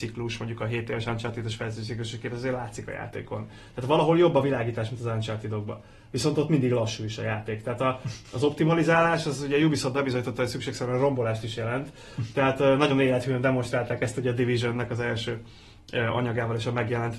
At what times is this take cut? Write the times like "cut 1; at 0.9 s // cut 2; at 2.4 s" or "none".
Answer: none